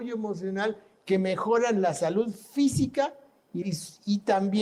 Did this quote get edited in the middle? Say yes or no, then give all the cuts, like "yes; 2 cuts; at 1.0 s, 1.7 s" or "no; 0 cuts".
yes; 1 cut; at 3.6 s